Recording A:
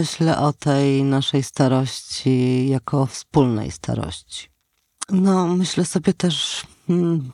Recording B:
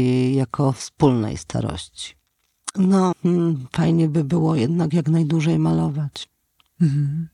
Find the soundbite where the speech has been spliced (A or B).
B